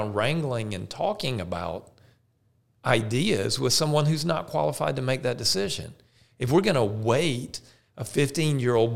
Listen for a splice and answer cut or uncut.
uncut